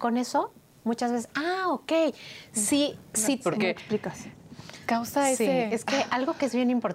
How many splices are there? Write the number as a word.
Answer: one